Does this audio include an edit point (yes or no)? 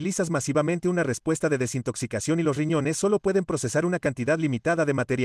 no